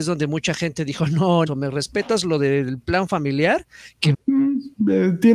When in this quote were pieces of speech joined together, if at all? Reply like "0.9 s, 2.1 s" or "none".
1.5 s, 4.1 s

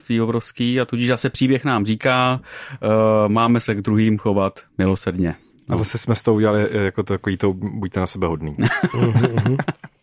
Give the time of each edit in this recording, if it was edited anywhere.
none

